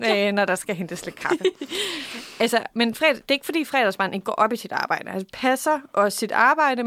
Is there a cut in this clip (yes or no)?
no